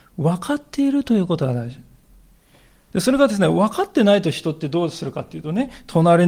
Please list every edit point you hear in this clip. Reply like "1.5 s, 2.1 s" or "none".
none